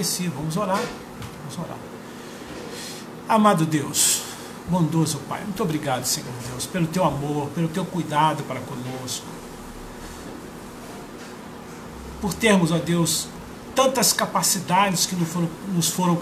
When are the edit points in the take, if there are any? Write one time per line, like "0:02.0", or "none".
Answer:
none